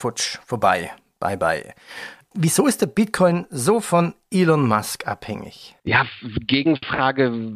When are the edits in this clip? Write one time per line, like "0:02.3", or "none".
0:05.8